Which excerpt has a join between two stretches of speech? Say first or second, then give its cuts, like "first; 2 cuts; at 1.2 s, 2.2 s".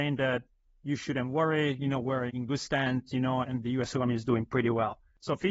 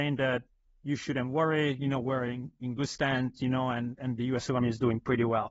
first; 2 cuts; at 2.3 s, 3.4 s